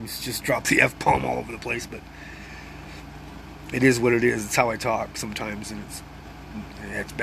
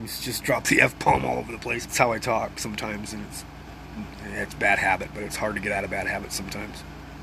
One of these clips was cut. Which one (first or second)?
second